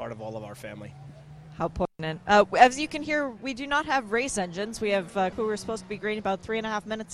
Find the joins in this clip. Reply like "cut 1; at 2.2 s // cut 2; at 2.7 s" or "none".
cut 1; at 5.3 s